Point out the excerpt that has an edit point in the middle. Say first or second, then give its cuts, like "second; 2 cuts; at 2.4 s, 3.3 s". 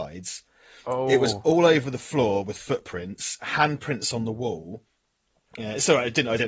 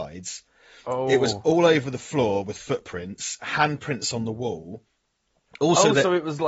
first; 1 cut; at 5.6 s